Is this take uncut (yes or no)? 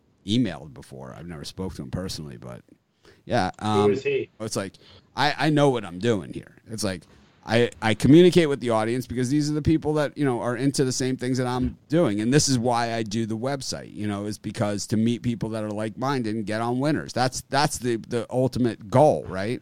no